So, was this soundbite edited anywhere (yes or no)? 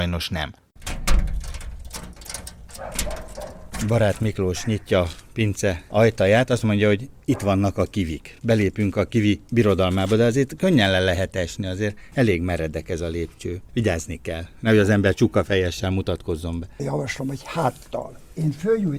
no